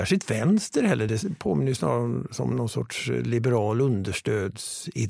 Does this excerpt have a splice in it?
no; 0 cuts

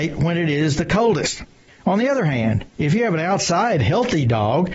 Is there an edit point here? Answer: no; 0 cuts

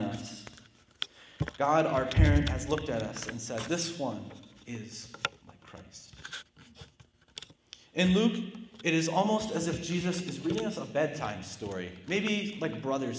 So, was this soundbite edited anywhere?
no; 0 cuts

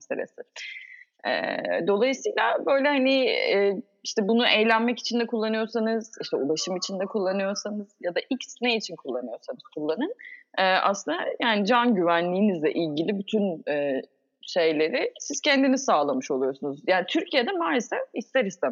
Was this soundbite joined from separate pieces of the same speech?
no; 0 cuts

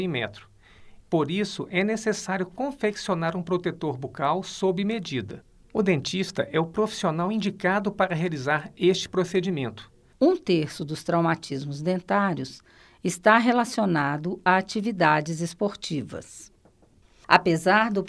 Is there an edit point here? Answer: yes; 2 cuts; at 1.0 s, 10.2 s

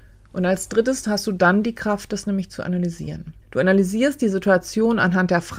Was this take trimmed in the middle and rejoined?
yes; 1 cut; at 3.4 s

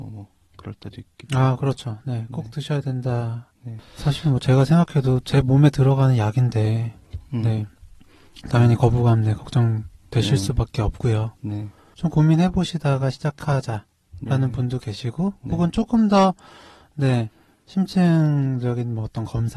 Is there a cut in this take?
yes; 2 cuts; at 3.8 s, 11.9 s

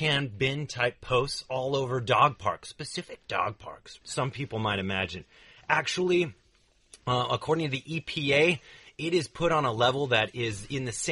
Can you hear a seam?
yes; 1 cut; at 4.0 s

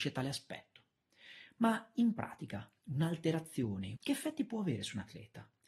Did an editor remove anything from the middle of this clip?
yes; 1 cut; at 4.0 s

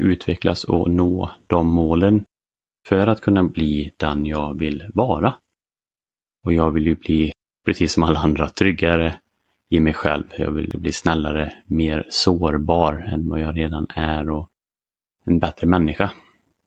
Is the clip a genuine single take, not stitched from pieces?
yes; 0 cuts

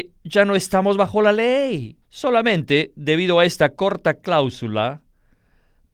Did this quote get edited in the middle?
yes; 1 cut; at 2.0 s

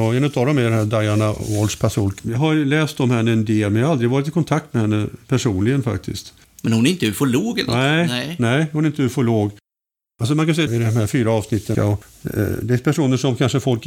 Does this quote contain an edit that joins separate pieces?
yes; 3 cuts; at 2.2 s, 10.7 s, 11.7 s

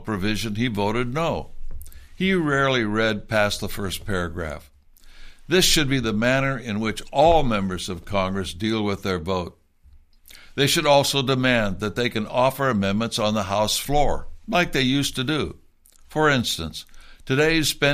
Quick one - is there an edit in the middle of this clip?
no; 0 cuts

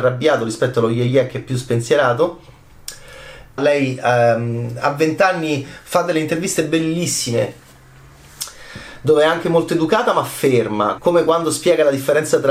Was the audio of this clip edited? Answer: yes; 2 cuts; at 3.6 s, 11.0 s

